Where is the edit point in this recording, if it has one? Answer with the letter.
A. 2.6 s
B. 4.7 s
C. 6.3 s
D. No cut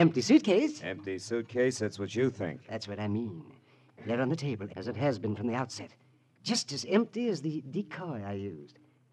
B